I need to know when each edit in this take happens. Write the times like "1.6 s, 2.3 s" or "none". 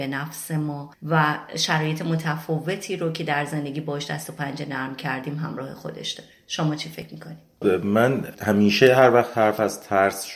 7.6 s

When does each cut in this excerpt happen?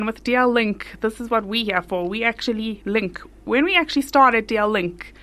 none

